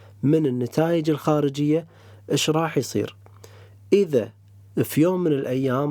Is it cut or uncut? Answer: uncut